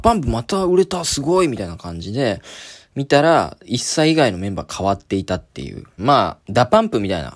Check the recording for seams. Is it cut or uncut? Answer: cut